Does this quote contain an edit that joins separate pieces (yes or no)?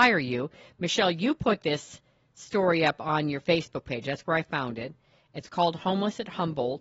no